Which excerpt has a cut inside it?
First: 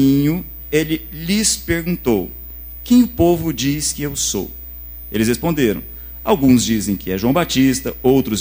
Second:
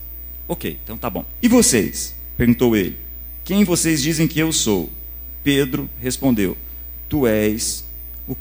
second; 1 cut; at 1.4 s

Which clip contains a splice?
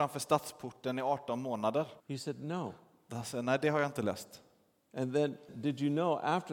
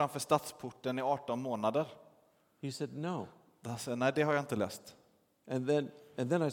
first; 2 cuts; at 2.0 s, 5.5 s

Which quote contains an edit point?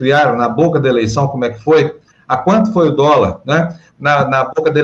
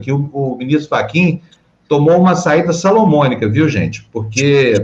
first; 1 cut; at 3.9 s

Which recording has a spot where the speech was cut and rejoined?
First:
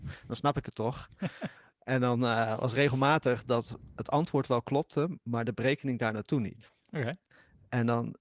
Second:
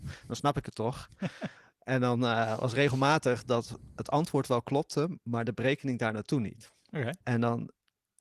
second; 1 cut; at 7.2 s

